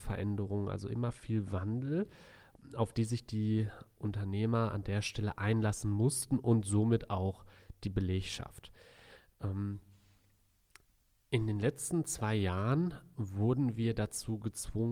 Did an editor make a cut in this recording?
no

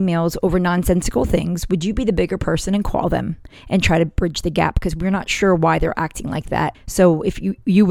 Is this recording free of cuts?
no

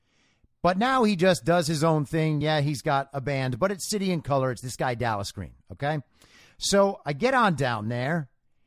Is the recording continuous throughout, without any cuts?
yes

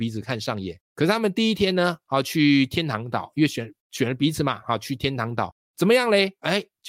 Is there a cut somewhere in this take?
no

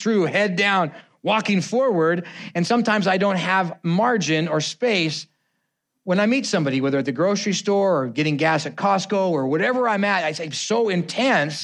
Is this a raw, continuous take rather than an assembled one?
yes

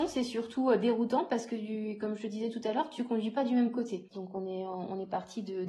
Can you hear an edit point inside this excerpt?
yes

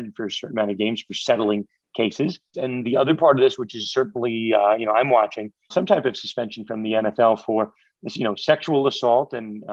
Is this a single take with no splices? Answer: no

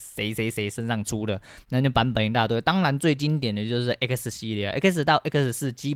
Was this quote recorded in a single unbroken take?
yes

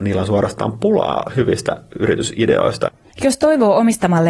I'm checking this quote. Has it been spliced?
yes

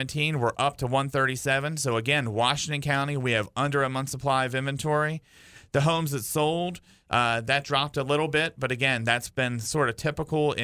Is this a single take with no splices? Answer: yes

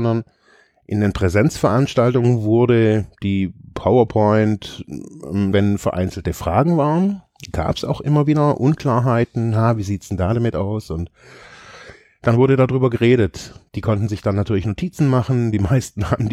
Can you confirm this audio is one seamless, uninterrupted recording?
no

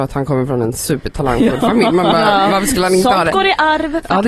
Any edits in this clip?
no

